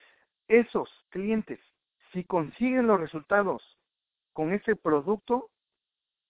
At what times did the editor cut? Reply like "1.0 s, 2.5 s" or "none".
1.0 s